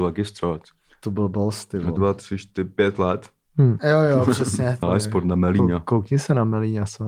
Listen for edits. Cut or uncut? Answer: cut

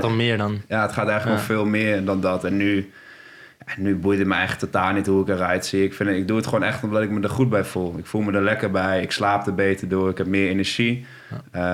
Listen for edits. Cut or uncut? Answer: uncut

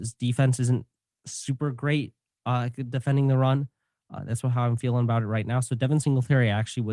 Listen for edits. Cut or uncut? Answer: uncut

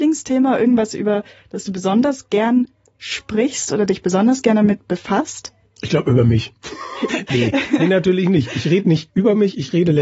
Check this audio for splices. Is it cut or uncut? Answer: cut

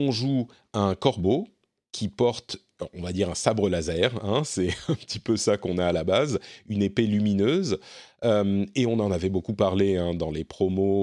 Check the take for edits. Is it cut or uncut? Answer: uncut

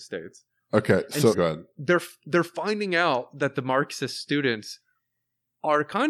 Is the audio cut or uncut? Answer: cut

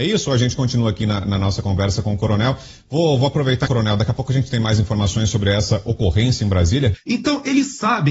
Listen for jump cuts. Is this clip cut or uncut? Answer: cut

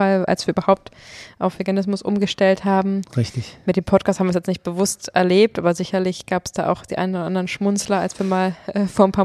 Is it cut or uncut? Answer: uncut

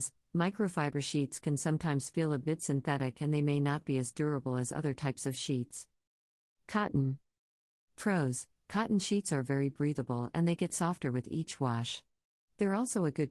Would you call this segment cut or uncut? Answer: uncut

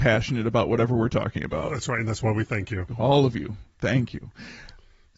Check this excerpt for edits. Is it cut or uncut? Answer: cut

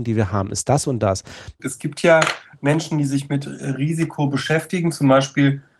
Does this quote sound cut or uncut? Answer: cut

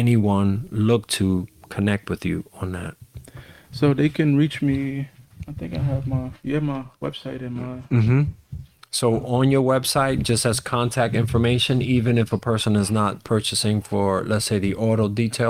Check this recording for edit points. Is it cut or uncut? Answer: uncut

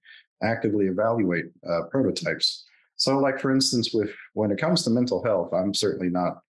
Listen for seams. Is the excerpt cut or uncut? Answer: uncut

